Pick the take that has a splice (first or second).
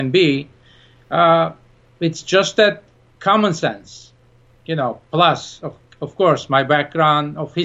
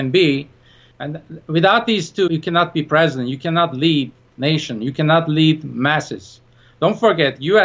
second